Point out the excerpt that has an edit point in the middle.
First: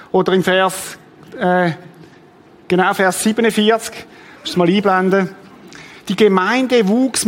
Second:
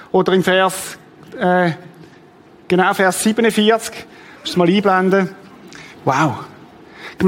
second; 1 cut; at 5.9 s

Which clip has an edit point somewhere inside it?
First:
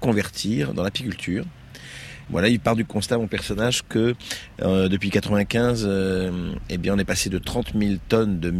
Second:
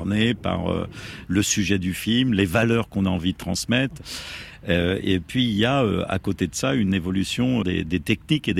second; 1 cut; at 7.6 s

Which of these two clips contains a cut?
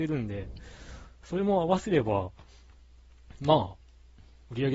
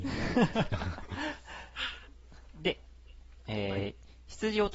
second; 1 cut; at 3.4 s

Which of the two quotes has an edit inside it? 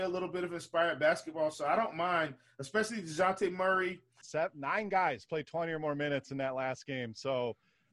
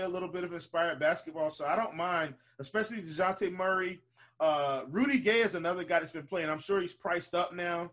first; 1 cut; at 4.2 s

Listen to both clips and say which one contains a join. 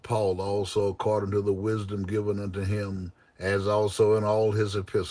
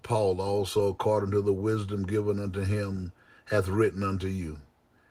first; 1 cut; at 3.2 s

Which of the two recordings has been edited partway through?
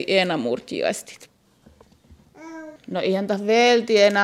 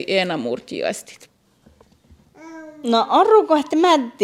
first; 1 cut; at 2.8 s

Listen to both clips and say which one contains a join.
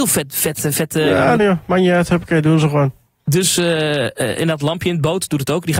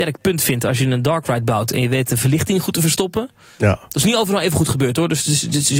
first; 1 cut; at 1.4 s

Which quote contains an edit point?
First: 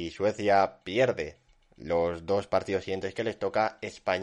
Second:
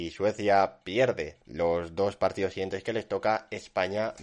second; 1 cut; at 1.4 s

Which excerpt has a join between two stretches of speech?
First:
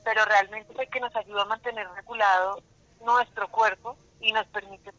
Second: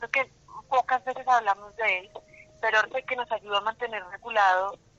second; 1 cut; at 2.8 s

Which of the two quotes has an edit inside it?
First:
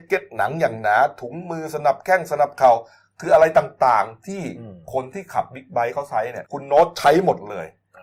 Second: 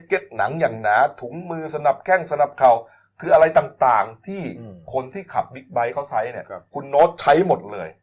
first; 1 cut; at 6.4 s

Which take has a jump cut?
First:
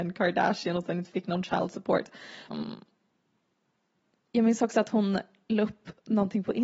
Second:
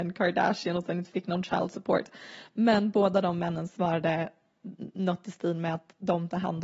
first; 1 cut; at 2.5 s

